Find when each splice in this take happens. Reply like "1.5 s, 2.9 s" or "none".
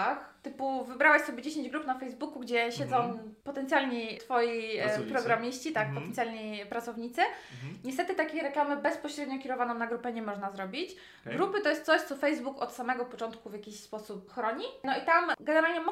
none